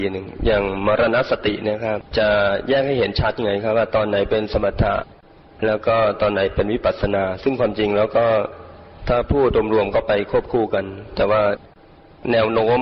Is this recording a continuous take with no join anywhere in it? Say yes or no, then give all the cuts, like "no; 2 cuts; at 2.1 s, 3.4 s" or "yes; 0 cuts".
no; 1 cut; at 2.1 s